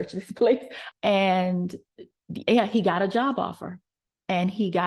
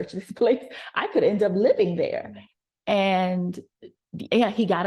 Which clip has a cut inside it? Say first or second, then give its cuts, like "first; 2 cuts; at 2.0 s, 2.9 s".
first; 1 cut; at 0.9 s